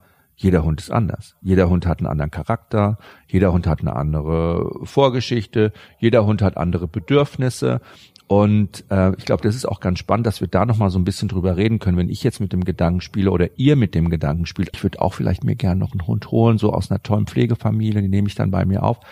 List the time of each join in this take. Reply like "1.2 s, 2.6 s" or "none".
14.7 s